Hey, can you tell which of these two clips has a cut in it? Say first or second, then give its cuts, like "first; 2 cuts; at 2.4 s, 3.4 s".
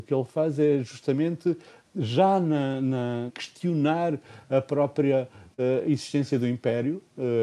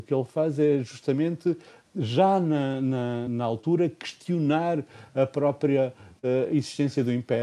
first; 1 cut; at 3.3 s